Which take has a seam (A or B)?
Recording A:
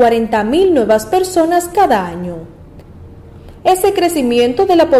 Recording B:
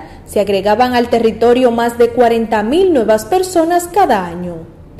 A